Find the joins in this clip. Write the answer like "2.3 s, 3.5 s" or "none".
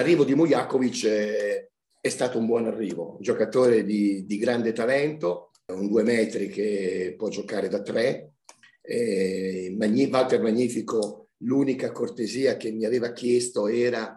5.7 s